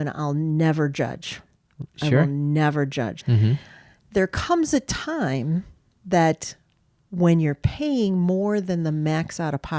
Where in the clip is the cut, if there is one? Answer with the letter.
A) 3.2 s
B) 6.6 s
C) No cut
A